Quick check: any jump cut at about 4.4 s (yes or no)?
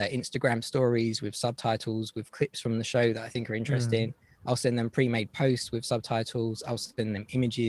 no